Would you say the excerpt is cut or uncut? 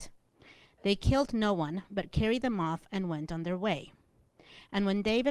uncut